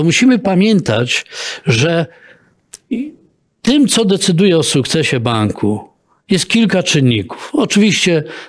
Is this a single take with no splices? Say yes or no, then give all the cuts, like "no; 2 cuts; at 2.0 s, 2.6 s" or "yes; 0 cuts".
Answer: yes; 0 cuts